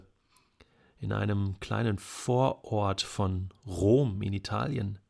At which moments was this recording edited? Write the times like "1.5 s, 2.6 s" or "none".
none